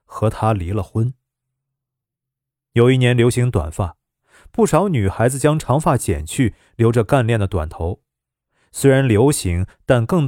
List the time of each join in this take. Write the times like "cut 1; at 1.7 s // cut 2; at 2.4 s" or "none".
none